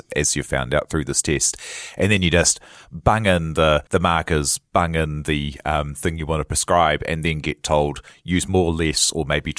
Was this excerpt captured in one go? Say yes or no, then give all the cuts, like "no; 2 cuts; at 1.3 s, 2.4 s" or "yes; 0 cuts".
no; 1 cut; at 3.9 s